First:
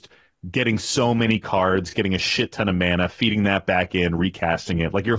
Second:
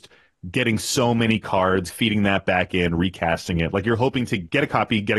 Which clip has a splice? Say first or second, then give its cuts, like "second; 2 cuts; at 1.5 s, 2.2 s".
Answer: second; 1 cut; at 1.9 s